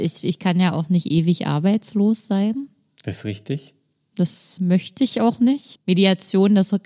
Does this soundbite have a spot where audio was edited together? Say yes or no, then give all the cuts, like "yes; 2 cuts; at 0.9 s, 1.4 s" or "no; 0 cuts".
yes; 2 cuts; at 4.6 s, 5.7 s